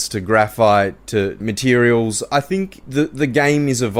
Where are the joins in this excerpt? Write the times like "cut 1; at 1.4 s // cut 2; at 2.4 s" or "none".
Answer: cut 1; at 1.4 s // cut 2; at 2.8 s